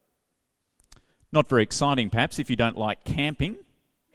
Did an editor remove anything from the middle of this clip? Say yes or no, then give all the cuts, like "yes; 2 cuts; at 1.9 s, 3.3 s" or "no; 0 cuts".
no; 0 cuts